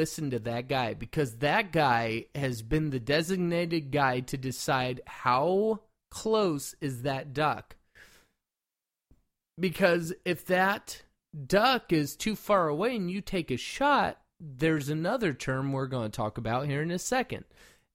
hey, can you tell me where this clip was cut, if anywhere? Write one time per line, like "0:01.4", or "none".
none